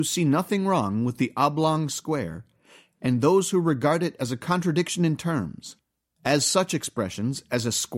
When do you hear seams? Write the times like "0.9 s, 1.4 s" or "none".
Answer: none